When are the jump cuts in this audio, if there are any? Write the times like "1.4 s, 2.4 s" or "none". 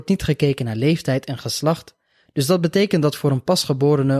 2.2 s